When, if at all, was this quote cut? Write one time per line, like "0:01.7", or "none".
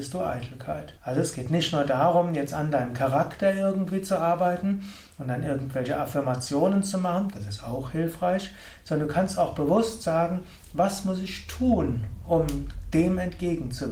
0:01.0